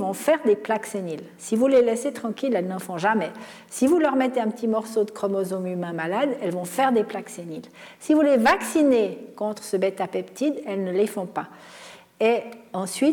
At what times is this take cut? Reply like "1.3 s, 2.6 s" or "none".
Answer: none